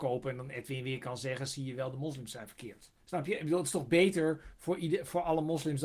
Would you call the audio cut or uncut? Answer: cut